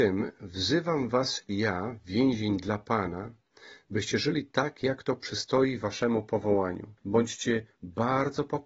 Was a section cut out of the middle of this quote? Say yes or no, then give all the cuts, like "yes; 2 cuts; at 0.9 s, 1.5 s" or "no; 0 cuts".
yes; 1 cut; at 7.0 s